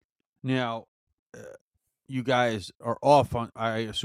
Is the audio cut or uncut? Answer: uncut